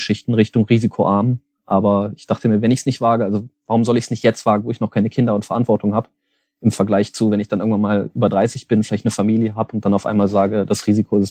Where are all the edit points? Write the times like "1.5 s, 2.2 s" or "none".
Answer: none